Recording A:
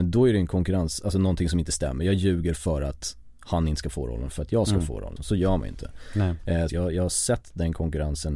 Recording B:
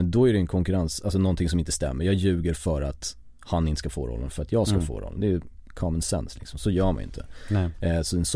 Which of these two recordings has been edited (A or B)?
A